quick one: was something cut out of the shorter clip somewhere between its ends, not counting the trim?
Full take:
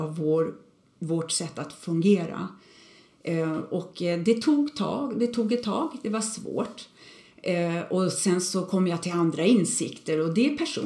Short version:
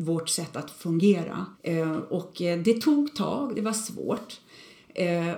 yes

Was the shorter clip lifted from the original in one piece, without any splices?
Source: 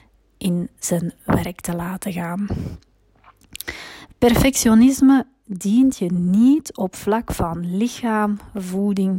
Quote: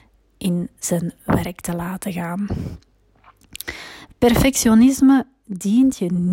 yes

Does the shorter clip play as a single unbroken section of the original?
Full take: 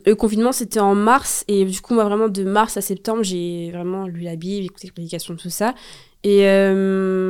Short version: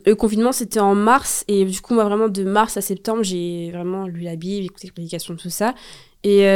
yes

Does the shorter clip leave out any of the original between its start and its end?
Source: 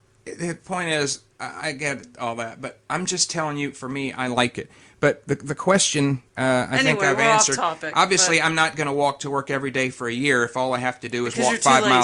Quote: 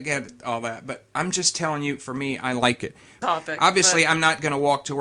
yes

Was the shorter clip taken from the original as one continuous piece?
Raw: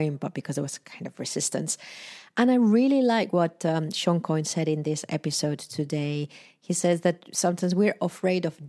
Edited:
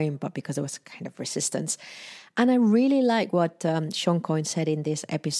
yes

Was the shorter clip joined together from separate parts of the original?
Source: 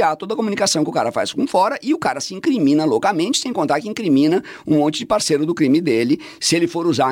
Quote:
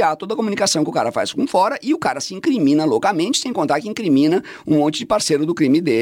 no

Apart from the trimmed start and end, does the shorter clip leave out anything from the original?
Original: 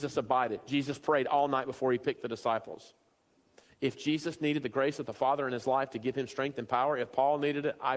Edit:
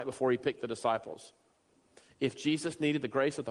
no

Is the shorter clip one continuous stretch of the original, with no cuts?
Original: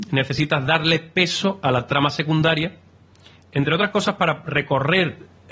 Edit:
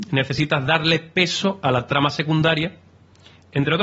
yes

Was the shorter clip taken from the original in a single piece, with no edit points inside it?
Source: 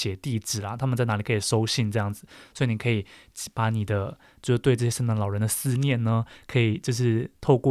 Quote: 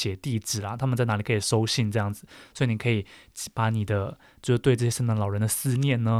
yes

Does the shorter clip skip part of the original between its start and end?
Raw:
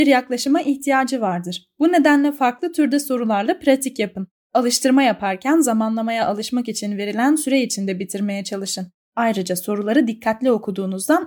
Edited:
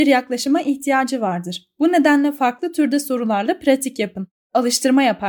no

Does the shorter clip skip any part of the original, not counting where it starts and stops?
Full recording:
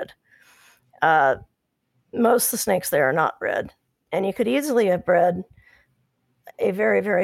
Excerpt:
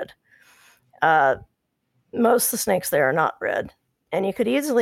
no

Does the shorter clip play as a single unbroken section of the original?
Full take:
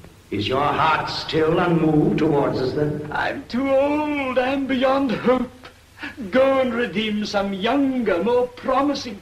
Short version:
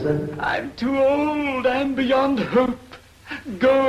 yes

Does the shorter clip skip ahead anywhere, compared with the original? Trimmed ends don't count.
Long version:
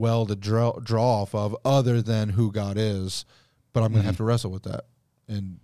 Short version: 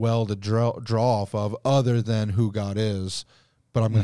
no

